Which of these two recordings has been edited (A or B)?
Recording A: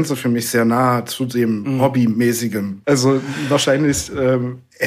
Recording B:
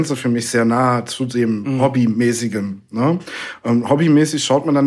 A